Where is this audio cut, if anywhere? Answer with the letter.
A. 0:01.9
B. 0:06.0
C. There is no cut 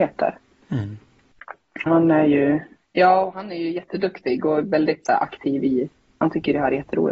A